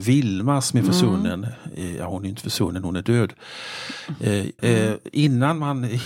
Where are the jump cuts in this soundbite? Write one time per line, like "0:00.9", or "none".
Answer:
0:04.6